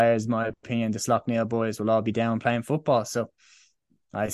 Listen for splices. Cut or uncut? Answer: uncut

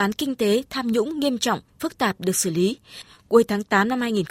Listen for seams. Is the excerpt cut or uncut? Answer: uncut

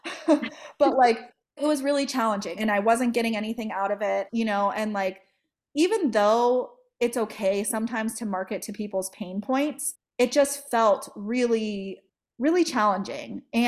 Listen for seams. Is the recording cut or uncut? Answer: cut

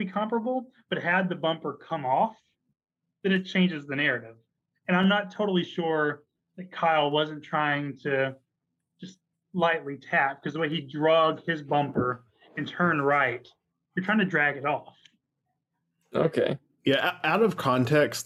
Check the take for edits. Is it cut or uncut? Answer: uncut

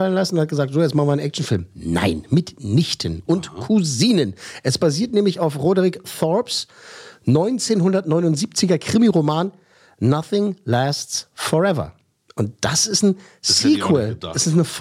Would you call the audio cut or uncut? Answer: uncut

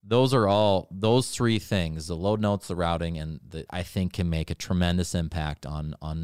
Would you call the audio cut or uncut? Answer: cut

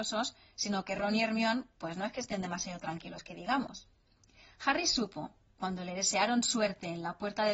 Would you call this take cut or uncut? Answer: uncut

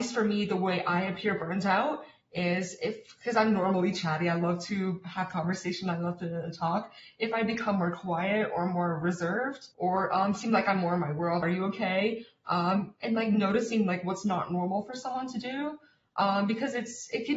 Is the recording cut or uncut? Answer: cut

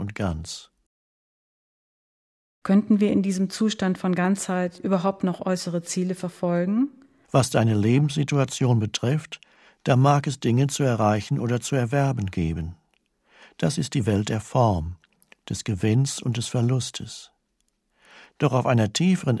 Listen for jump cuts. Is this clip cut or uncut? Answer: cut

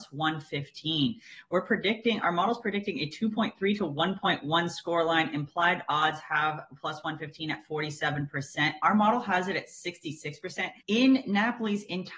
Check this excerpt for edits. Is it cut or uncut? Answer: cut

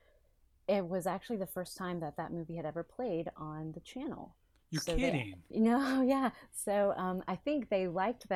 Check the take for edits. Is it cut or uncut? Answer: uncut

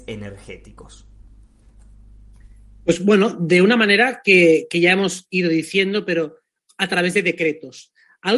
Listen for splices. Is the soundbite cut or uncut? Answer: uncut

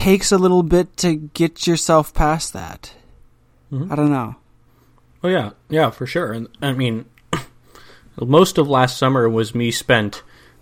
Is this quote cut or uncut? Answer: uncut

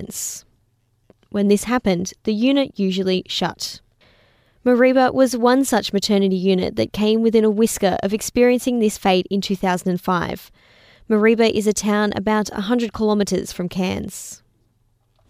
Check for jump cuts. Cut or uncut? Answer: uncut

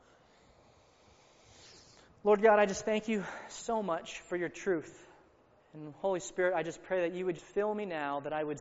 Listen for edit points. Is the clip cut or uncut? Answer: cut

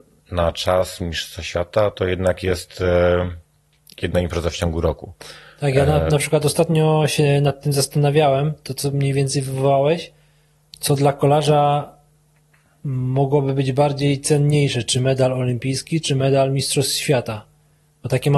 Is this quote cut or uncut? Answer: uncut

